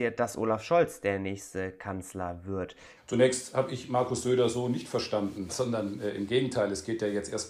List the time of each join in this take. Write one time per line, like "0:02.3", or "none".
0:03.0
0:05.5